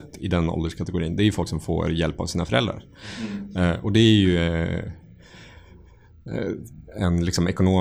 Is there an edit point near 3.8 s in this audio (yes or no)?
no